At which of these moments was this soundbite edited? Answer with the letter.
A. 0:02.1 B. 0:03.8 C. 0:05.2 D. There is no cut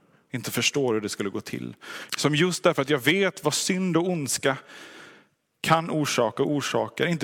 A